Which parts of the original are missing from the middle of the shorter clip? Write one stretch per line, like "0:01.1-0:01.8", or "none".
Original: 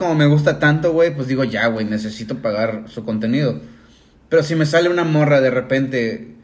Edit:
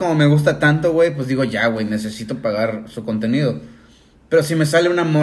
none